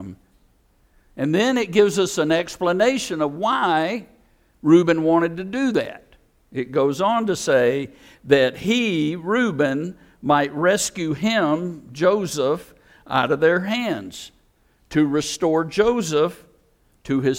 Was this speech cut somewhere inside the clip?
no; 0 cuts

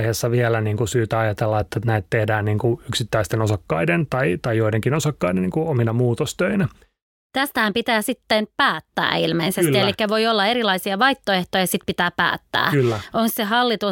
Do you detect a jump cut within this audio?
no; 0 cuts

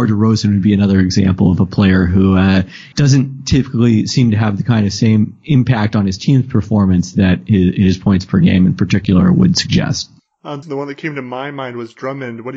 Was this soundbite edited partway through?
yes; 2 cuts; at 2.9 s, 10.6 s

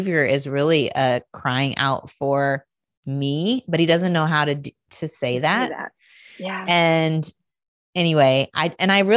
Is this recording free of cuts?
yes; 0 cuts

